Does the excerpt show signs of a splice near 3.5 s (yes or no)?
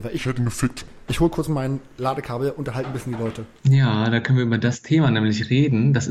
no